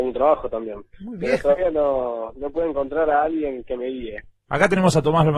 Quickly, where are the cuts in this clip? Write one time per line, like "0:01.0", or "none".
0:00.9

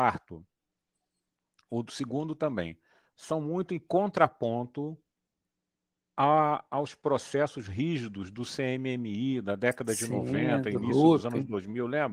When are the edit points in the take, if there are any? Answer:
none

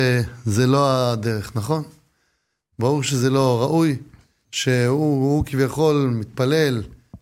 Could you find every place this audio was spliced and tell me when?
0:04.4

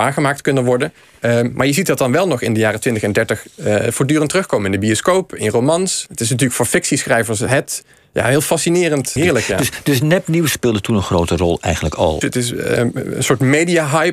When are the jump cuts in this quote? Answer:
0:09.2
0:10.5
0:12.2

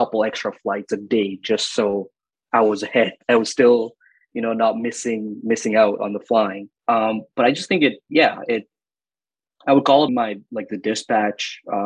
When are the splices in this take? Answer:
0:06.8
0:10.1

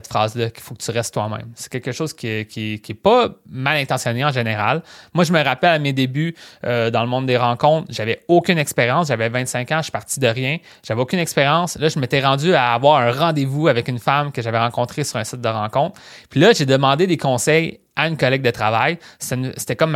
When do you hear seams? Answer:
none

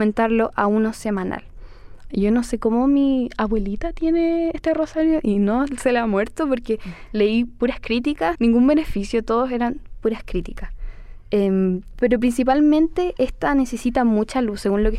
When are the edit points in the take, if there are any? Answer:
0:02.1
0:08.3

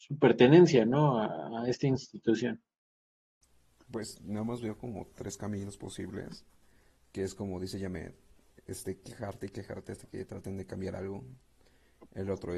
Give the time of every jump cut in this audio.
none

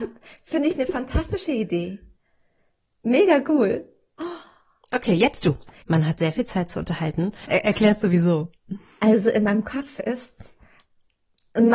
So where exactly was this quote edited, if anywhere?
0:05.8
0:07.5

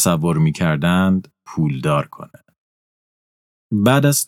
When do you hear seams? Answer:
none

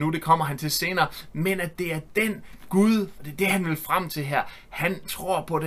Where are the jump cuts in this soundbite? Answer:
0:01.3

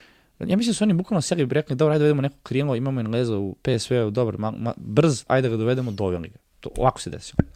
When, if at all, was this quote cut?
0:05.3

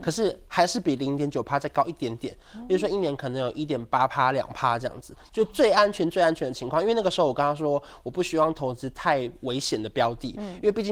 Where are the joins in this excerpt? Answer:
none

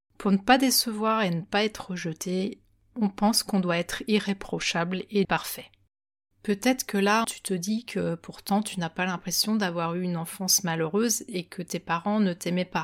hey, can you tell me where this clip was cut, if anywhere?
0:05.2
0:07.2

